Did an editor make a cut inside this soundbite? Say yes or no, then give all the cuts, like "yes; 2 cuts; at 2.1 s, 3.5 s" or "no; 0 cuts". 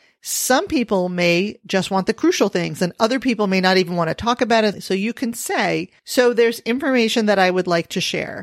yes; 2 cuts; at 4.7 s, 6.0 s